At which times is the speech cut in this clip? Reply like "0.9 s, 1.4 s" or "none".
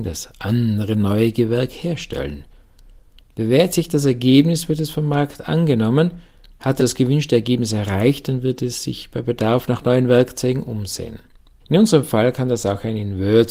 6.8 s, 11.6 s